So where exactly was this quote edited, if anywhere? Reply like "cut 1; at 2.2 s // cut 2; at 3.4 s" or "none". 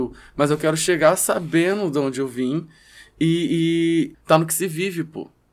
cut 1; at 4.1 s